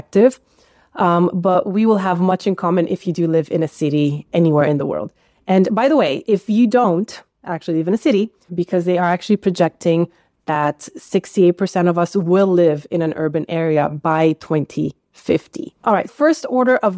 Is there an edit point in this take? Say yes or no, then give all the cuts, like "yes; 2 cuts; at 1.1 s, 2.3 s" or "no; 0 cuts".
yes; 2 cuts; at 8.5 s, 16.1 s